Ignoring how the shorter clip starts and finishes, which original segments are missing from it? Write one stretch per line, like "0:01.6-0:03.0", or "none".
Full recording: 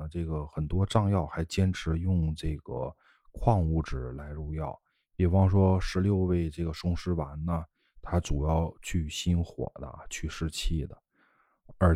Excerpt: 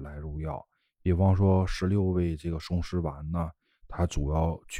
none

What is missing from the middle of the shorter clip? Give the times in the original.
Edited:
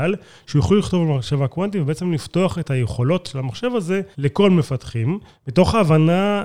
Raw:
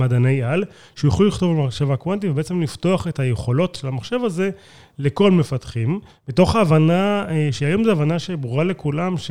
0:04.6-0:04.9

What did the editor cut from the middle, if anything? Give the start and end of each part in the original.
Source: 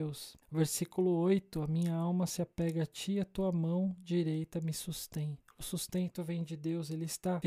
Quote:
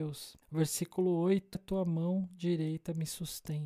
0:01.5-0:03.2

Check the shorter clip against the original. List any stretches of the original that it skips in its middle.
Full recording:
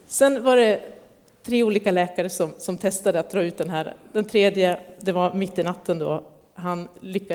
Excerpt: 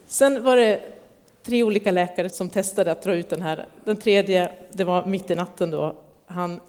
0:02.3-0:02.6

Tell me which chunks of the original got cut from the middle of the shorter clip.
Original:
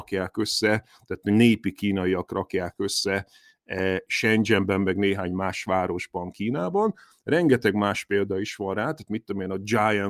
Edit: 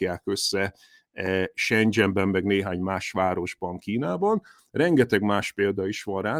none

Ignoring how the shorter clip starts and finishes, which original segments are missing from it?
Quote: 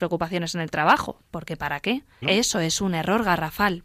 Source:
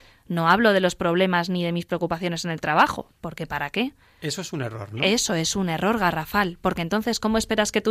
0:04.1-0:05.0

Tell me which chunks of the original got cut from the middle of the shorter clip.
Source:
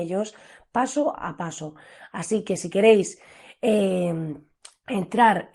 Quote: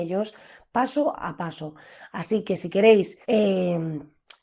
0:03.2-0:03.6

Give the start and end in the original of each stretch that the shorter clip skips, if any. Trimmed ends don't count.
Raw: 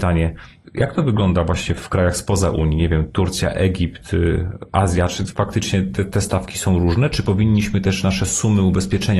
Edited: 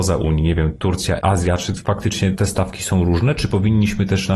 0:03.5-0:04.7
0:05.8-0:06.1

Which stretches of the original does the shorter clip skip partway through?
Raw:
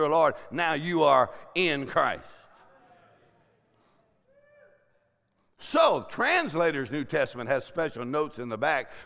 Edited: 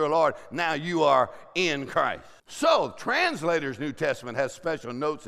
0:02.4-0:05.5

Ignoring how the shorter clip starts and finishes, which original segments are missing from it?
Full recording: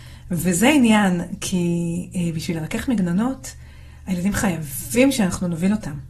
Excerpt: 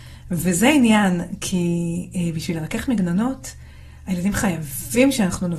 none

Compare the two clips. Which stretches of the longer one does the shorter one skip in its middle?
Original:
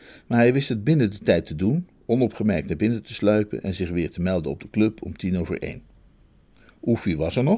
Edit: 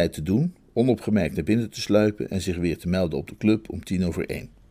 none

